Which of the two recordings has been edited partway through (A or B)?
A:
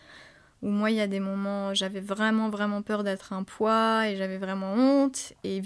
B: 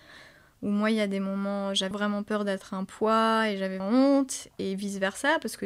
B